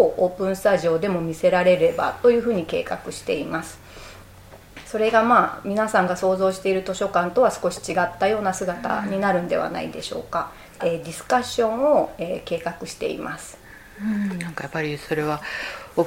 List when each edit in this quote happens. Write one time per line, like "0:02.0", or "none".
0:10.8